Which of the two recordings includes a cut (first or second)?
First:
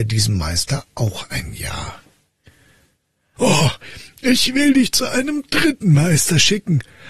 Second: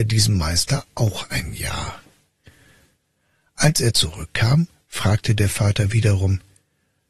first